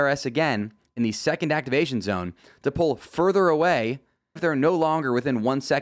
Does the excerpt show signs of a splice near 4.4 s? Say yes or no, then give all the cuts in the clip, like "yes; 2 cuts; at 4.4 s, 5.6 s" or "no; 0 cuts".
yes; 1 cut; at 4.4 s